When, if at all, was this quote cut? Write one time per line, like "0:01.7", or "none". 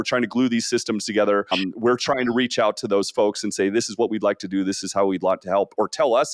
none